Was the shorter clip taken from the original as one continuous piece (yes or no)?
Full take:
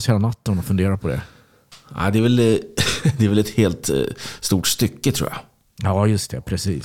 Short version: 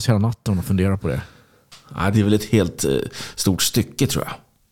no